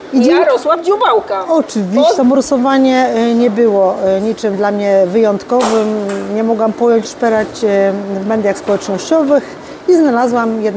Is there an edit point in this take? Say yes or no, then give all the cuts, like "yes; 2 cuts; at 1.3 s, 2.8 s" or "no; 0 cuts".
yes; 2 cuts; at 2.2 s, 7.0 s